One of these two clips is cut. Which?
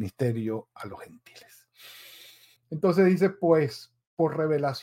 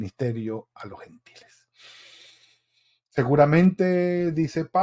first; 1 cut; at 2.6 s

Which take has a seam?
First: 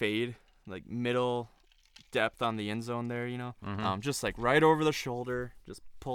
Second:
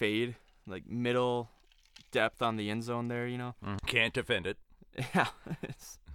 second; 1 cut; at 3.8 s

